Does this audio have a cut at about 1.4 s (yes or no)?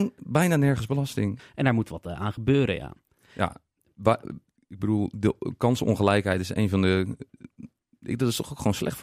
yes